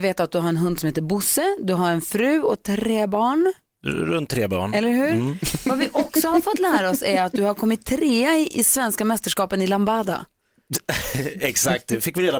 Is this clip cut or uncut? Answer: uncut